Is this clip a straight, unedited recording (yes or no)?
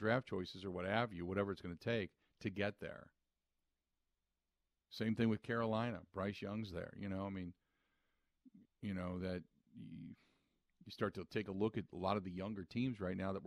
no